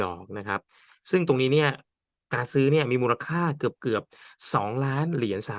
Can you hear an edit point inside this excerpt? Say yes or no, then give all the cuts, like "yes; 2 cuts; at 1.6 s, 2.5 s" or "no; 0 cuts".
no; 0 cuts